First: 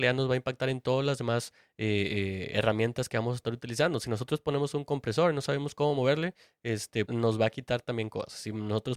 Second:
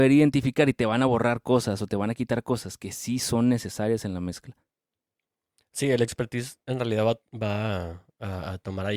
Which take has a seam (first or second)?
first